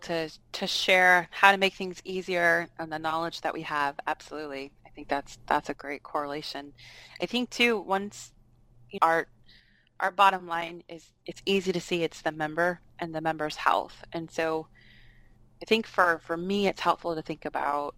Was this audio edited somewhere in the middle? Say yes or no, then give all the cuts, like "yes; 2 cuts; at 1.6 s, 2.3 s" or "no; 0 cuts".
yes; 2 cuts; at 9.0 s, 12.9 s